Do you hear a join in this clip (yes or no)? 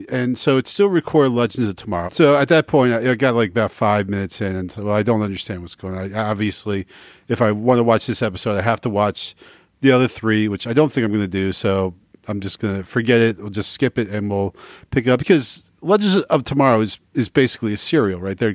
yes